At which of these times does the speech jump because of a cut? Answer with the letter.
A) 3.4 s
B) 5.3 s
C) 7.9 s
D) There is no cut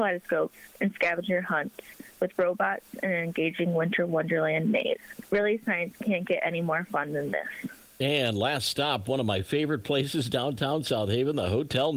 D